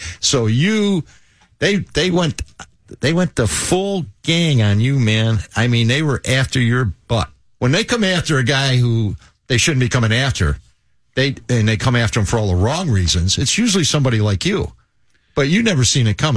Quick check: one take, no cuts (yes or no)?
yes